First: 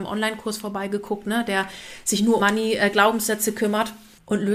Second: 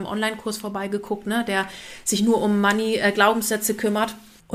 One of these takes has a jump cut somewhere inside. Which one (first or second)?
first